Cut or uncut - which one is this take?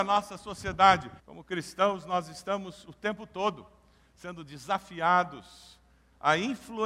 cut